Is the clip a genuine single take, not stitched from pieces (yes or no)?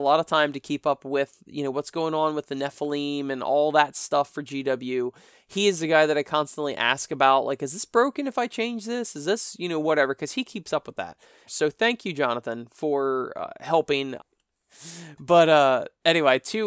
no